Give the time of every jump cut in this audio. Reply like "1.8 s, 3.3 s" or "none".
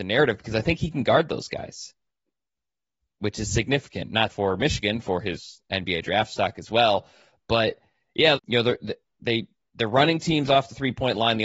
4.3 s, 8.4 s